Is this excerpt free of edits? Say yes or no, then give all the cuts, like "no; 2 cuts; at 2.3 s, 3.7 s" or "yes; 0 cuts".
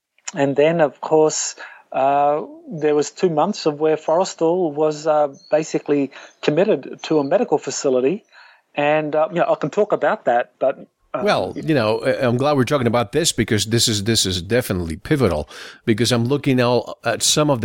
yes; 0 cuts